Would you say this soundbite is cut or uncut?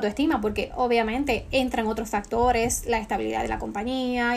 uncut